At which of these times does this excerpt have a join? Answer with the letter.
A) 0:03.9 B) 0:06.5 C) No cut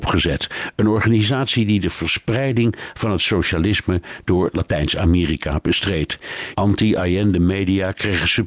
B